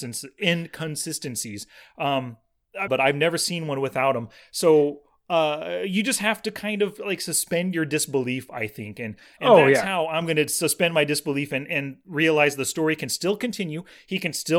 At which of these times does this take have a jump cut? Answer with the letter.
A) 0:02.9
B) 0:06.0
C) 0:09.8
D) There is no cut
A